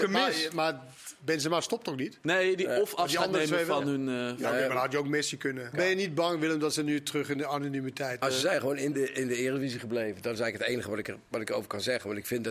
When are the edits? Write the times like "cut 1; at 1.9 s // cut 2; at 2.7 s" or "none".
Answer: cut 1; at 5.7 s // cut 2; at 8.2 s